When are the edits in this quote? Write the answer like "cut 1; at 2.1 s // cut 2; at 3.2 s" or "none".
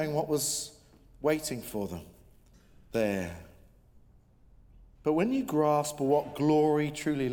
cut 1; at 4.9 s